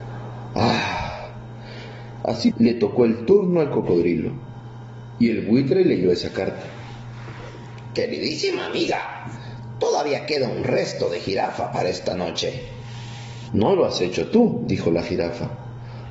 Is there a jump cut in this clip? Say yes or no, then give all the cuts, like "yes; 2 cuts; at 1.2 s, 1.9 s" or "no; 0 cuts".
yes; 2 cuts; at 2.5 s, 13.5 s